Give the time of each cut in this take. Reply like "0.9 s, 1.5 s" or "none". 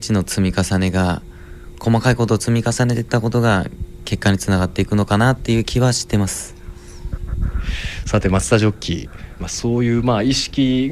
9.4 s